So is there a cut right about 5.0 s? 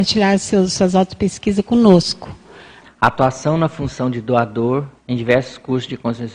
yes; 2 cuts; at 2.8 s, 5.0 s

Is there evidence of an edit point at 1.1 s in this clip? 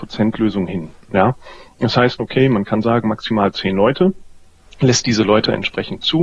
yes; 2 cuts; at 1.1 s, 2.2 s

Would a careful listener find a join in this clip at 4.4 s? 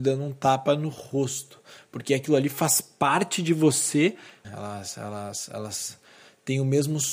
yes; 1 cut; at 4.4 s

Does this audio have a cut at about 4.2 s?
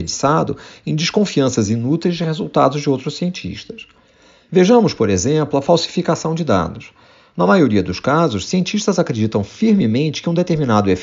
no; 0 cuts

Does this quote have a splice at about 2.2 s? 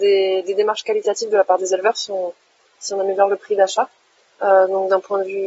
no; 1 cut; at 4.4 s

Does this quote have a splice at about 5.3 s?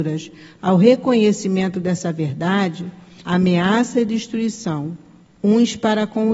no; 1 cut; at 3.2 s

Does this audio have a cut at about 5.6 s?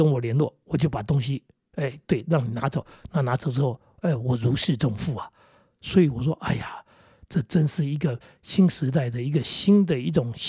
no; 0 cuts

